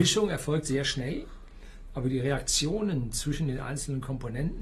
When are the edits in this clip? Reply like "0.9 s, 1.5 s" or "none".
none